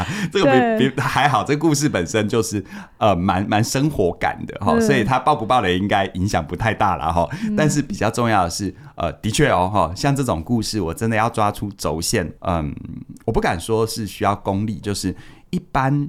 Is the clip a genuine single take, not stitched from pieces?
no; 2 cuts; at 12.4 s, 14.8 s

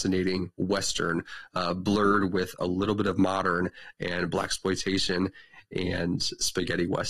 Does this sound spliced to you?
no; 0 cuts

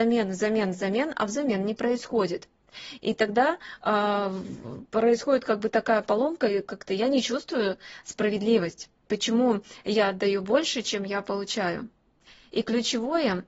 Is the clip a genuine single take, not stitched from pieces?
no; 1 cut; at 3.0 s

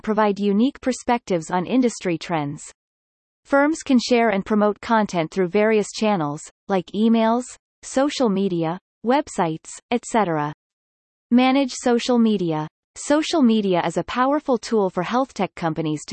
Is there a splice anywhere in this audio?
no; 0 cuts

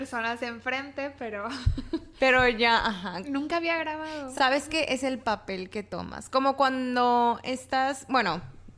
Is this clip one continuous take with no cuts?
yes; 0 cuts

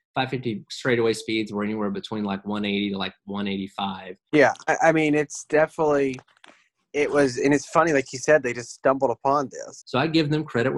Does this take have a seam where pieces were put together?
yes; 2 cuts; at 4.3 s, 9.8 s

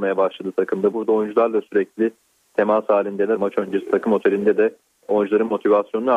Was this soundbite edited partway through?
yes; 2 cuts; at 0.9 s, 3.4 s

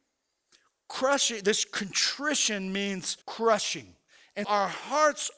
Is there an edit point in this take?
yes; 2 cuts; at 3.2 s, 4.4 s

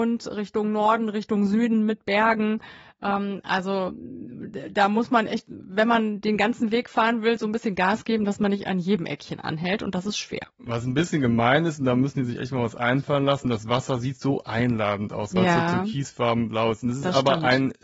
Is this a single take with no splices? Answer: yes; 0 cuts

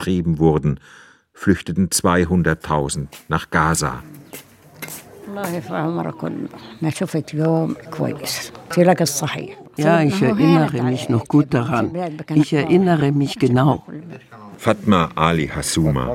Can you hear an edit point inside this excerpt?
no; 0 cuts

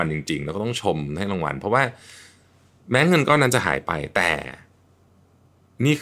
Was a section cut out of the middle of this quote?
no; 0 cuts

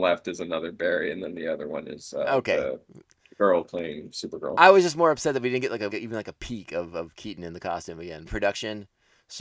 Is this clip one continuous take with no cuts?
no; 2 cuts; at 5.9 s, 8.3 s

